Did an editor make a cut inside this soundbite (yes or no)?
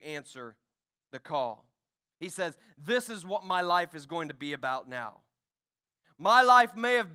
no